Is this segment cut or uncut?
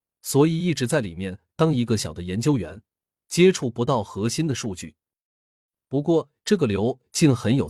cut